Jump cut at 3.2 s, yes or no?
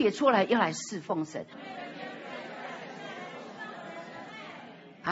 no